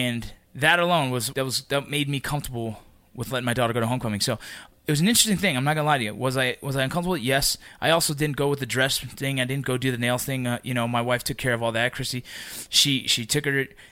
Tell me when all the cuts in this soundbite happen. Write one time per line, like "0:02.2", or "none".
0:01.3